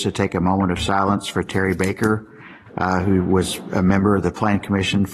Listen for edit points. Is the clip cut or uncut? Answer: uncut